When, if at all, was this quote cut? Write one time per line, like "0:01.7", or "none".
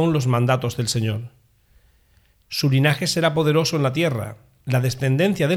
0:02.4